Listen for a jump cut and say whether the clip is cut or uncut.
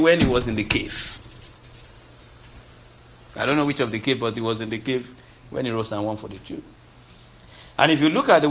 uncut